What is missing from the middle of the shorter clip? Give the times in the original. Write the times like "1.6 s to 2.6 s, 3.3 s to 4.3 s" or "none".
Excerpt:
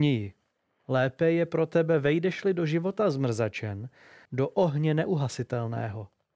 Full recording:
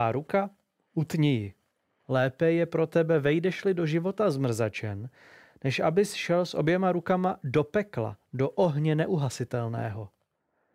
5.5 s to 8.3 s